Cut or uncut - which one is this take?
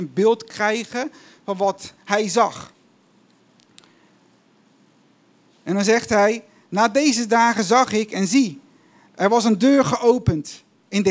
uncut